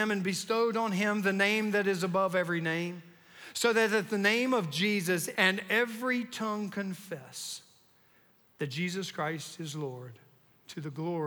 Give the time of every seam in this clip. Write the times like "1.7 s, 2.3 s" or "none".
5.3 s